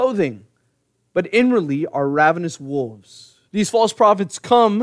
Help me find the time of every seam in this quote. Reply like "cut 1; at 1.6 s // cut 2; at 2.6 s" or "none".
cut 1; at 3.5 s